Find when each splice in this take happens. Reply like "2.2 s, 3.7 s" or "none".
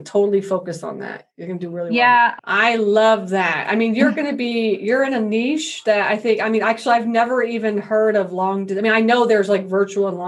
2.4 s